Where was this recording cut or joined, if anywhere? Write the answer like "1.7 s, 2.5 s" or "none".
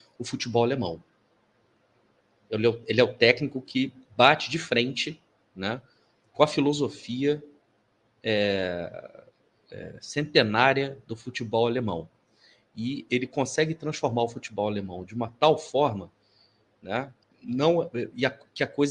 17.2 s